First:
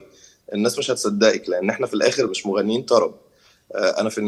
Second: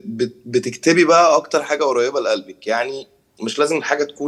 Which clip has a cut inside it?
first; 1 cut; at 2.3 s

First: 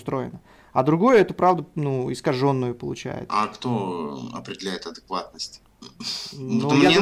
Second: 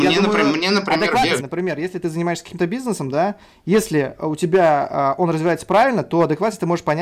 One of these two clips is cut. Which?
second; 1 cut; at 1.4 s

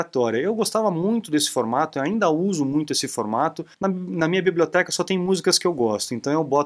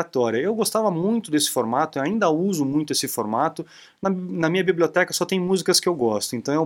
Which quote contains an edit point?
first; 1 cut; at 3.7 s

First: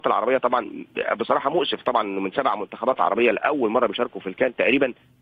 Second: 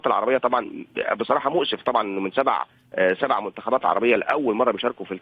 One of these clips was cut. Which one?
first; 1 cut; at 2.3 s

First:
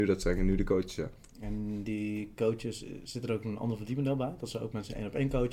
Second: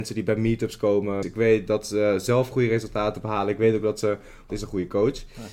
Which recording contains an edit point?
second; 2 cuts; at 1.2 s, 4.5 s

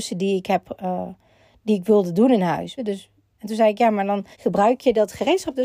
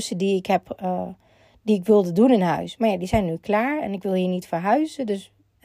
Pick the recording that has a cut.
first; 2 cuts; at 2.8 s, 4.3 s

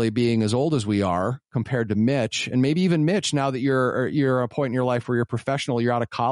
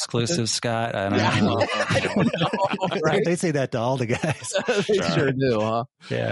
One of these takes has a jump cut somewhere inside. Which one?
second; 1 cut; at 3.2 s

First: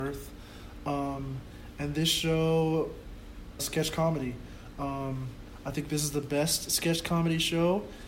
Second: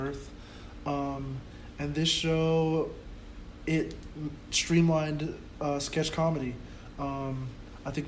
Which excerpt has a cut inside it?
first; 1 cut; at 3.6 s

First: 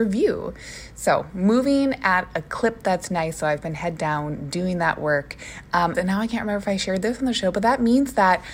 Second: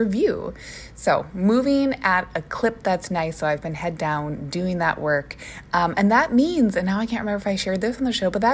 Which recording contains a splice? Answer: first; 1 cut; at 5.9 s

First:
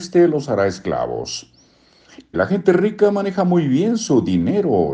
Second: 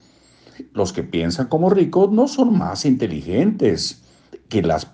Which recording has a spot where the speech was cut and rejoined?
first; 1 cut; at 2.3 s

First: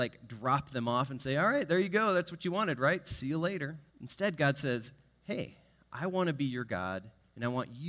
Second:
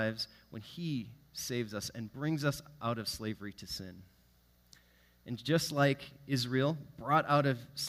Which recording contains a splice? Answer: first; 1 cut; at 3.9 s

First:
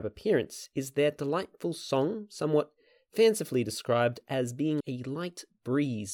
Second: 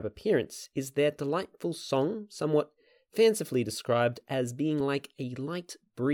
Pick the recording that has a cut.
first; 1 cut; at 4.8 s

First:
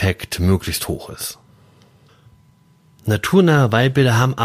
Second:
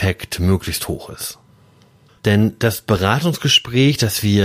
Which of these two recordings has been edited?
second; 1 cut; at 2.2 s

